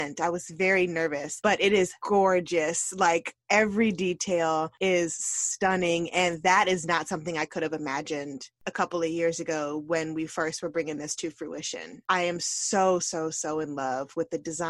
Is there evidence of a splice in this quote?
no; 0 cuts

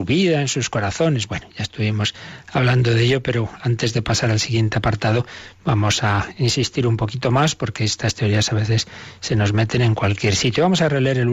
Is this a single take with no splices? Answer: yes; 0 cuts

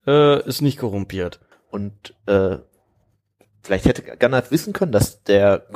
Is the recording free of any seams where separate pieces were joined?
no; 1 cut; at 1.5 s

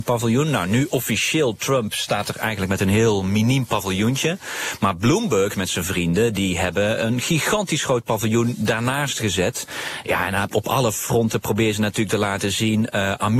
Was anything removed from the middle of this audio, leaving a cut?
no; 0 cuts

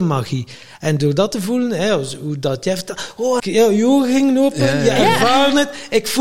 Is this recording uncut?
no; 1 cut; at 3.4 s

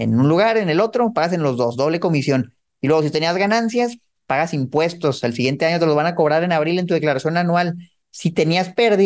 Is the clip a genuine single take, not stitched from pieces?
yes; 0 cuts

